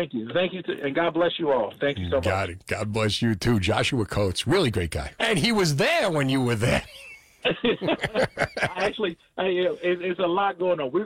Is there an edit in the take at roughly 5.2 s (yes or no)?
yes